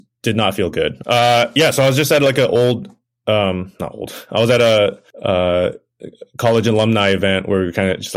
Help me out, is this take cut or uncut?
cut